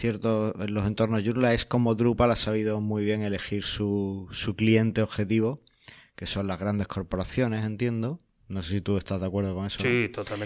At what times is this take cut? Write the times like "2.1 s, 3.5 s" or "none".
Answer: none